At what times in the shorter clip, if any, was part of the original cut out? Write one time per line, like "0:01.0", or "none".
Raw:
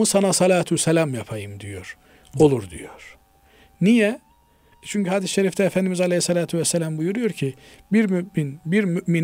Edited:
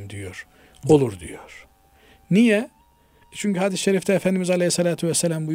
none